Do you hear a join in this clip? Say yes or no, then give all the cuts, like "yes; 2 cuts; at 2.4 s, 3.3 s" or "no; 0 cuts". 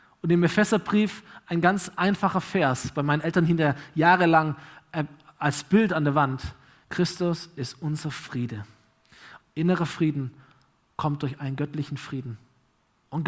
yes; 2 cuts; at 6.8 s, 9.4 s